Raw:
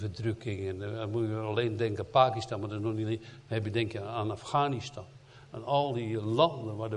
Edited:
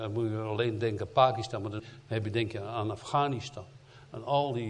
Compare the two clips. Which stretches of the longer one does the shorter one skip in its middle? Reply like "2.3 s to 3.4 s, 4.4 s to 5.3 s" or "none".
2.8 s to 3.2 s